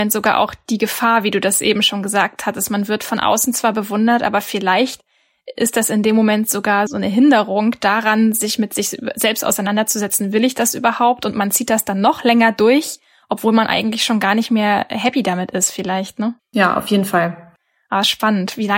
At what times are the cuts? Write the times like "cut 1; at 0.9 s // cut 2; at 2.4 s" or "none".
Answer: none